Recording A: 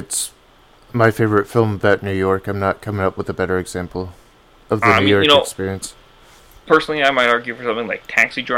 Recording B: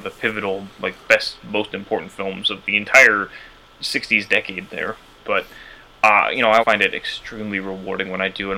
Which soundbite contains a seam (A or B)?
B